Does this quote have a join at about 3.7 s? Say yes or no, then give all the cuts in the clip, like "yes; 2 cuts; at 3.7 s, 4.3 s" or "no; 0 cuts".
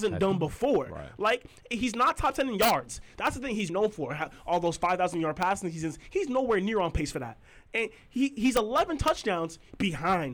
yes; 1 cut; at 3.7 s